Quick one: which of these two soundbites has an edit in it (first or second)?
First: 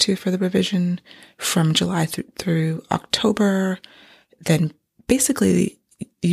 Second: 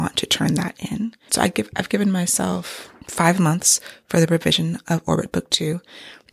second